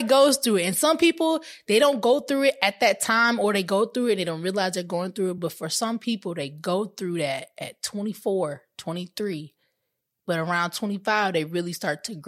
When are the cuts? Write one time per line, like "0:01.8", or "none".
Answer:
none